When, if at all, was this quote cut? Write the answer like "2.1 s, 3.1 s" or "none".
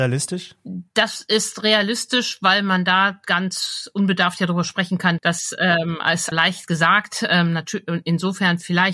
5.2 s, 6.3 s